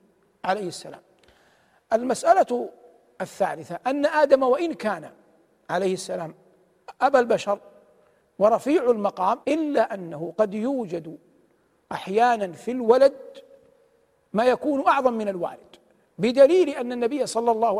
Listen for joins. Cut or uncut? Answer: cut